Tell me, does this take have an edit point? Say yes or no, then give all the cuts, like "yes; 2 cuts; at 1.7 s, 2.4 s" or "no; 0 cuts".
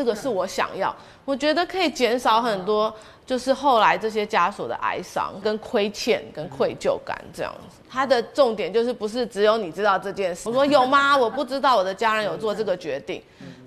yes; 3 cuts; at 5.4 s, 7.8 s, 10.5 s